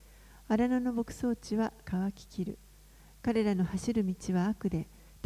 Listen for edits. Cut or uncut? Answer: uncut